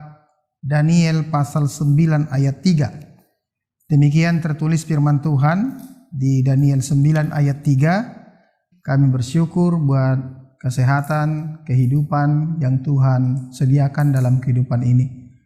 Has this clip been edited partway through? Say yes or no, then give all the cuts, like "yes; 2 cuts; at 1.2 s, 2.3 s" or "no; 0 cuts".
yes; 1 cut; at 8.7 s